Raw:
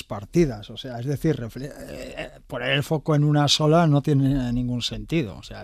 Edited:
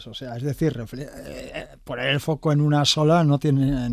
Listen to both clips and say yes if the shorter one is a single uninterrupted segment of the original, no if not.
yes